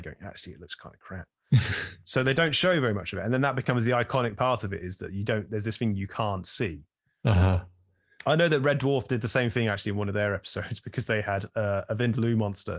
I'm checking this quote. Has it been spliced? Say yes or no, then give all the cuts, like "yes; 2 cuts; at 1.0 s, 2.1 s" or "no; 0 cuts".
no; 0 cuts